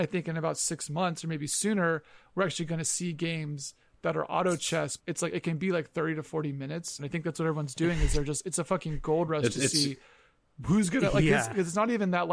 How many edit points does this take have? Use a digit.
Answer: 2